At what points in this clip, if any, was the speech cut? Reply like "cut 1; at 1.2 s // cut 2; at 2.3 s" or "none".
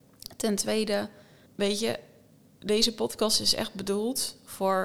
cut 1; at 1.5 s